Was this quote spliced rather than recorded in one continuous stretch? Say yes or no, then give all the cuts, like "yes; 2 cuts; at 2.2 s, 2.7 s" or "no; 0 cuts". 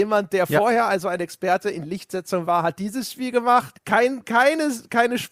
yes; 1 cut; at 3.7 s